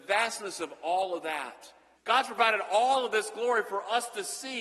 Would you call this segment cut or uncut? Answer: cut